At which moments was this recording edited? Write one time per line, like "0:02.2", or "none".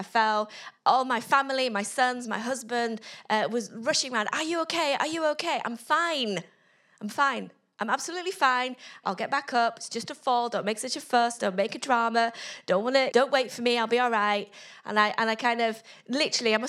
0:09.0
0:13.1